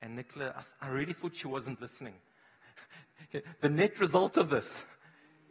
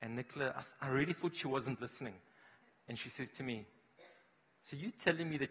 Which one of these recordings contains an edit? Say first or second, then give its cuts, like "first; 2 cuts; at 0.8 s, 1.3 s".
first; 1 cut; at 2.6 s